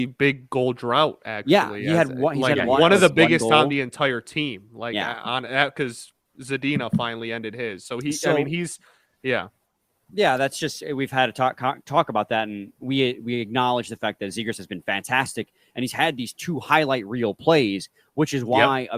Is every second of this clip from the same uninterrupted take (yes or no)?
yes